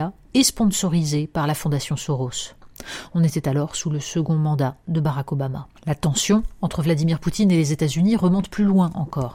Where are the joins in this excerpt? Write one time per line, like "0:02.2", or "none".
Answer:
0:05.8

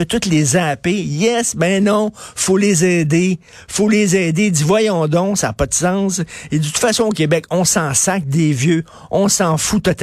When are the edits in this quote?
none

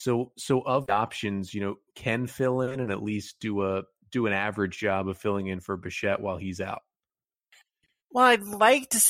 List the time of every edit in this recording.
0:01.9

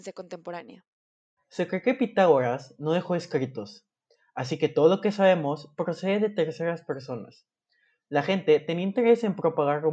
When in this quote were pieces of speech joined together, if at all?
none

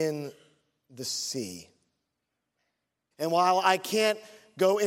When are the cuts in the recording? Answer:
0:03.1

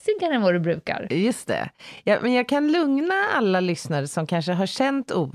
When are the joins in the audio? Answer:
none

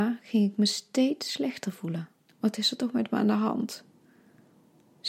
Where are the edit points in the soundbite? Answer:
0:02.3

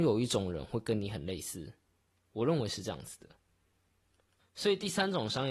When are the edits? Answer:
0:04.4

